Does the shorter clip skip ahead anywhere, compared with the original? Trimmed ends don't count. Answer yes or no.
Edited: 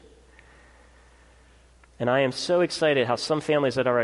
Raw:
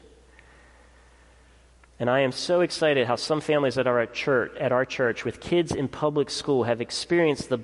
no